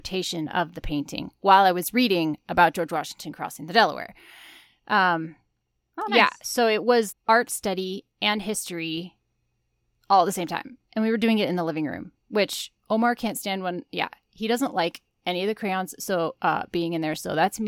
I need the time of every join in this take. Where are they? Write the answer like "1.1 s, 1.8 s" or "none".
7.1 s